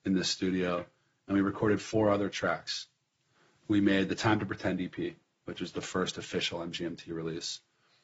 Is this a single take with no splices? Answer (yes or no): yes